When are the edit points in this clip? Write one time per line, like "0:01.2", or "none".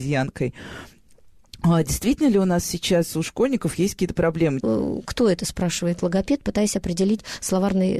0:04.6